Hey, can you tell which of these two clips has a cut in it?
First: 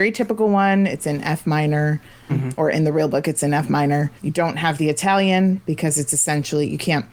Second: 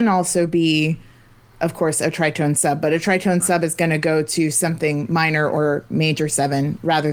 first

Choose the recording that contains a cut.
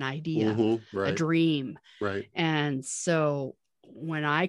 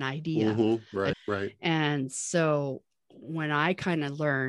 second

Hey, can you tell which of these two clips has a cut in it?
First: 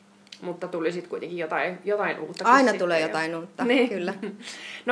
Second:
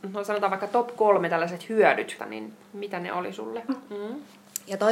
second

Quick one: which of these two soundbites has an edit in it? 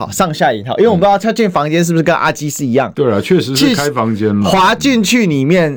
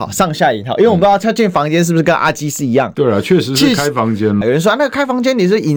second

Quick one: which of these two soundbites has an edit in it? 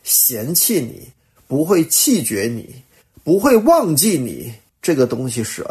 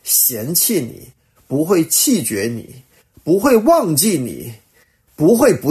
first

